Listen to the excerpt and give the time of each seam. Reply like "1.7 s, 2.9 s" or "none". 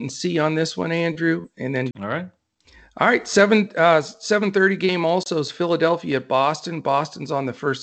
1.9 s